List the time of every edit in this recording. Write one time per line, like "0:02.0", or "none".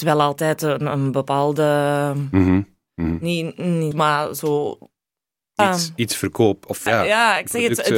0:03.9
0:05.6
0:06.9